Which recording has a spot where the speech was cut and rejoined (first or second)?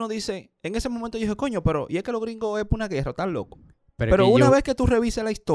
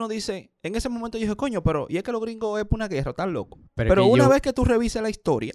second